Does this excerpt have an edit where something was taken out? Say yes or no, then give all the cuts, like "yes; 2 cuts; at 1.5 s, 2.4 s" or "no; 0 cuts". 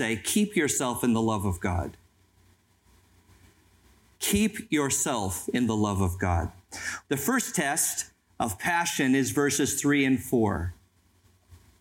yes; 1 cut; at 7.0 s